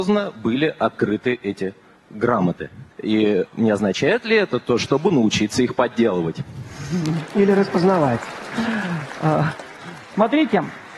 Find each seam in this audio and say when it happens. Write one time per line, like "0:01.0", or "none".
0:02.9
0:04.8